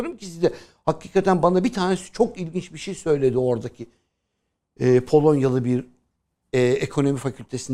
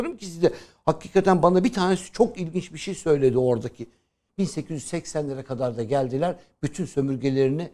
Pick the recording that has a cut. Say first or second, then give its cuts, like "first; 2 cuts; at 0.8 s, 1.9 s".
second; 1 cut; at 4.3 s